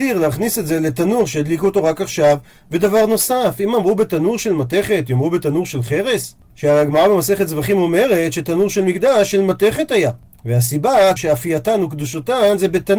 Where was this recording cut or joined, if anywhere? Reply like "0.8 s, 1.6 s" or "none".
11.2 s